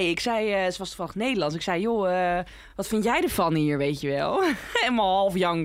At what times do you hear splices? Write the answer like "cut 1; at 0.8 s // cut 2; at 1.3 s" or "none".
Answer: none